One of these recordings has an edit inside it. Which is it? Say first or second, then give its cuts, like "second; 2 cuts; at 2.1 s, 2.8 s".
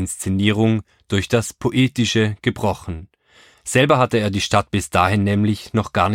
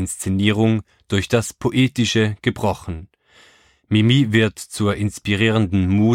first; 1 cut; at 3.5 s